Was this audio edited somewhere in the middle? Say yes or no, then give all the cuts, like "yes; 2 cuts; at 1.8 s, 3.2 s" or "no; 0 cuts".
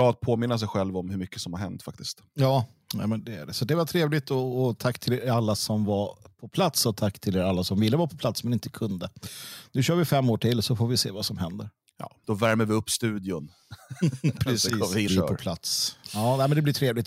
yes; 3 cuts; at 3.2 s, 12.2 s, 15.1 s